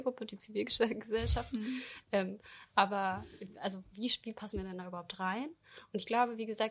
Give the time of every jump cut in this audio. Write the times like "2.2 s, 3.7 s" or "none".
none